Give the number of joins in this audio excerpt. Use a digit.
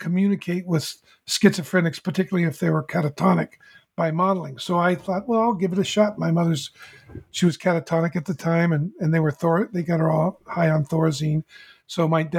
0